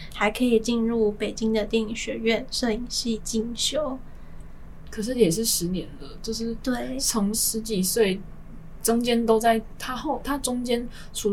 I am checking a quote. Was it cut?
yes; 1 cut; at 7.3 s

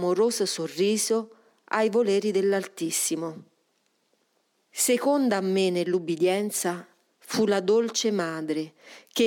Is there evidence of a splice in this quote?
yes; 1 cut; at 4.6 s

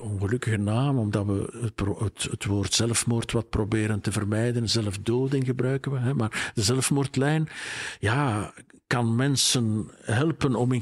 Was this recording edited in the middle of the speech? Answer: no; 0 cuts

